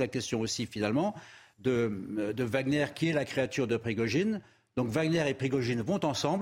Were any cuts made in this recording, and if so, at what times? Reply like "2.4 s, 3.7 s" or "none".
none